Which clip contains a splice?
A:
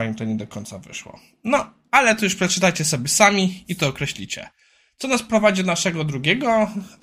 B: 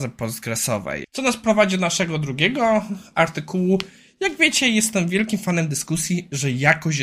B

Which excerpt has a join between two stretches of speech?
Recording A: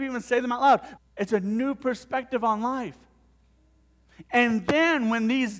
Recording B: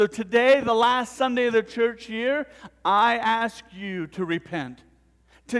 A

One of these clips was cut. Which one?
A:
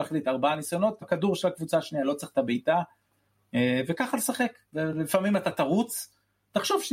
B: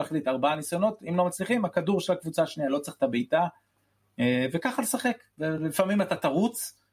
A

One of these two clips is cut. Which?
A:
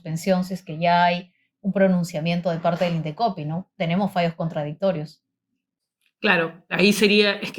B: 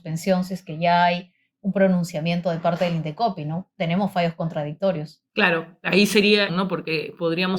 B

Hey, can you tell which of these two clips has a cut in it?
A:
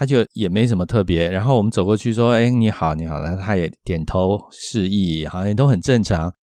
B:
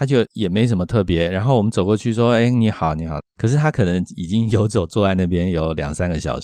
B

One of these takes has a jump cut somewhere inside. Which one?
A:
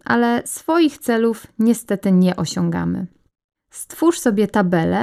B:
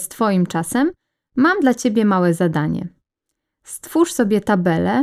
A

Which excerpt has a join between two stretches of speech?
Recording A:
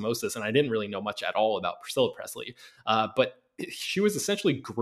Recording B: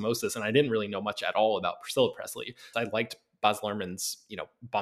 B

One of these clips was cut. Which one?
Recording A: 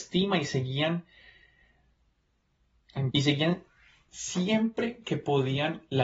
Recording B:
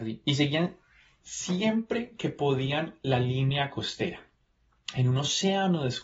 A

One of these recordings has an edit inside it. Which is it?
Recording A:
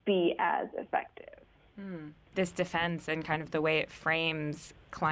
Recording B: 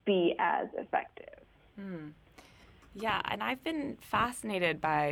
A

